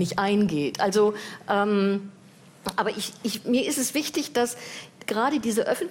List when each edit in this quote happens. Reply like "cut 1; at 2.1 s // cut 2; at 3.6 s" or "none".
none